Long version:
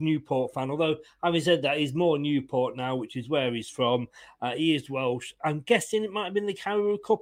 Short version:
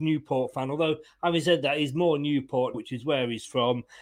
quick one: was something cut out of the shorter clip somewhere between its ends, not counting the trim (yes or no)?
yes